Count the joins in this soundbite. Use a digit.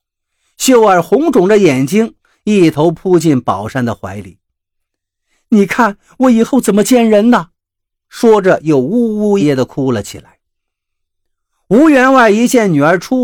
1